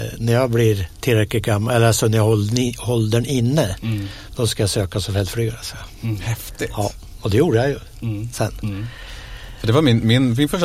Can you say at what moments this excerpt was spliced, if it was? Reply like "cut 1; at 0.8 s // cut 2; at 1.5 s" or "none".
none